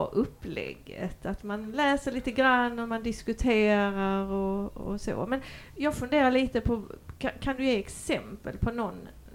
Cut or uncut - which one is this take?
uncut